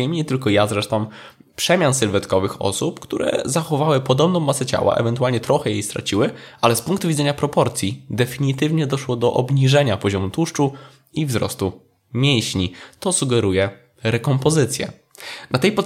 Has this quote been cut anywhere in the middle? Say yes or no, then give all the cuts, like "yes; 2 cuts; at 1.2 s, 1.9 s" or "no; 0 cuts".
no; 0 cuts